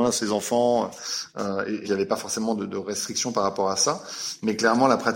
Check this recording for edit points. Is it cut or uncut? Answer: cut